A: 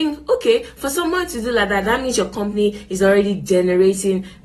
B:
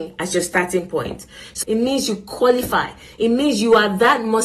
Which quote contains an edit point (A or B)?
B